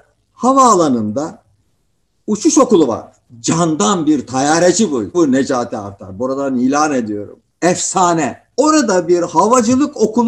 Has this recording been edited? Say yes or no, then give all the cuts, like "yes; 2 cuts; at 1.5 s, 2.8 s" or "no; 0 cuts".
no; 0 cuts